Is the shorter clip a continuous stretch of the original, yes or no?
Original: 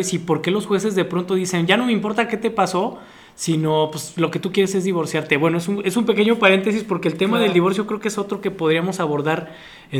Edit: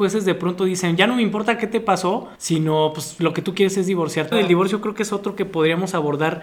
no